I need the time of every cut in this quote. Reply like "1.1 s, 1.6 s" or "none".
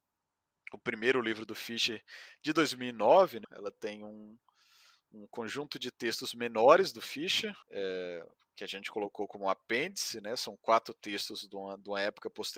3.4 s, 7.6 s